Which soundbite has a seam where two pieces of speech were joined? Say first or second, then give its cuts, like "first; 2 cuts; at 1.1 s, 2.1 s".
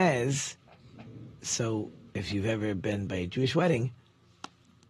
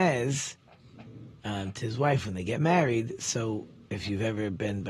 first; 1 cut; at 1.4 s